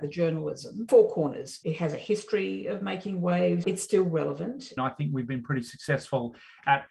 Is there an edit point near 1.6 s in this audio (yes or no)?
no